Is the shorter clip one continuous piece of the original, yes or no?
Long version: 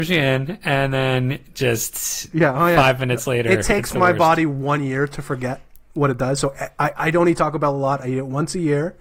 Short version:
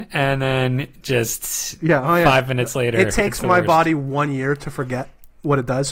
yes